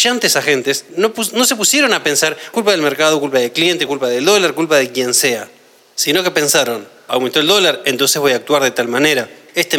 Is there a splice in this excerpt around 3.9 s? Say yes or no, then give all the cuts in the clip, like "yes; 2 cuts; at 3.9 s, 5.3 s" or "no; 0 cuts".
yes; 3 cuts; at 2.5 s, 3.9 s, 7.1 s